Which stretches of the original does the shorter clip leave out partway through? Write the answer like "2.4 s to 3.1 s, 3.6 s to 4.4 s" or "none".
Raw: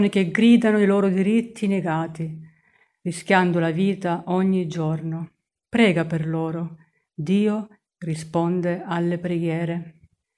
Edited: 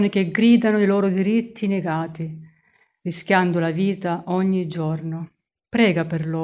none